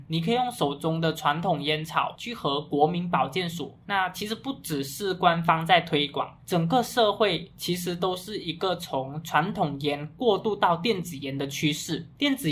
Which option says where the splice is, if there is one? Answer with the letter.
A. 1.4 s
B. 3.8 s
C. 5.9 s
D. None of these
B